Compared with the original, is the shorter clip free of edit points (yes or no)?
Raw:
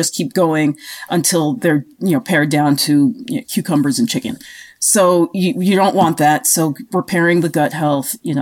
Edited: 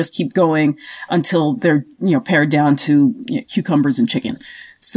yes